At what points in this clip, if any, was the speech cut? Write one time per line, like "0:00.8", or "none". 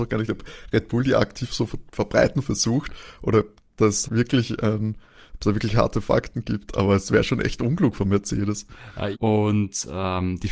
0:04.0
0:09.1